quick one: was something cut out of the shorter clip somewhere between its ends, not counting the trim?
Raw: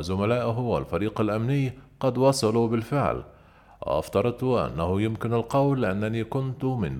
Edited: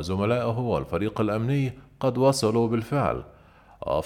no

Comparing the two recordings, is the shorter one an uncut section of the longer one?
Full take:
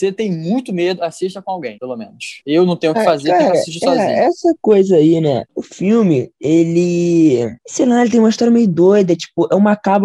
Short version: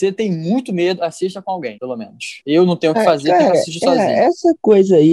yes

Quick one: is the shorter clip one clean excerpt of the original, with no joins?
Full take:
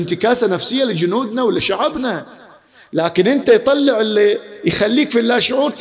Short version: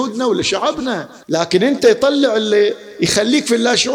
no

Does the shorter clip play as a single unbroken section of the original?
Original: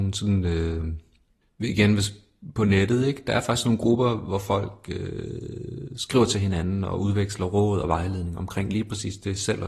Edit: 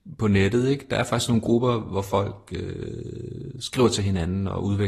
yes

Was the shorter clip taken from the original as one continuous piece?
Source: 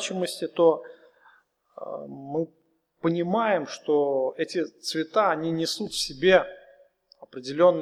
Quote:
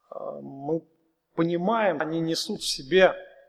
no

